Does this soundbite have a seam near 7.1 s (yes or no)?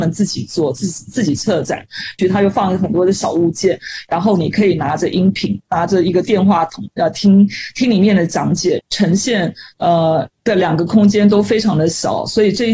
no